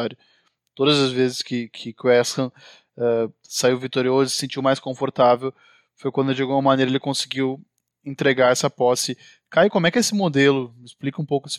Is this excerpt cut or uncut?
uncut